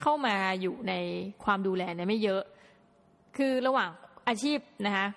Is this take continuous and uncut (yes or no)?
yes